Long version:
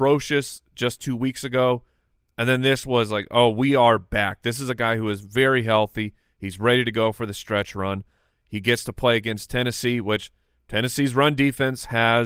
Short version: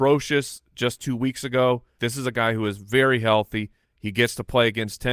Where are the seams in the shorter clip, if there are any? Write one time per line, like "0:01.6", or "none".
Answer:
0:02.0
0:03.8

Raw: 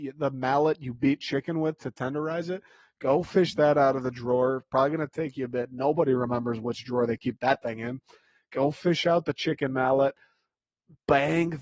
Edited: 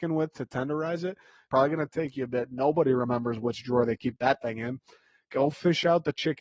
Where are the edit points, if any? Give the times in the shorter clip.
0:01.5

